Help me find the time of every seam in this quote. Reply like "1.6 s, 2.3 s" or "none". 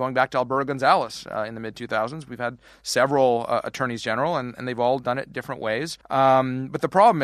6.0 s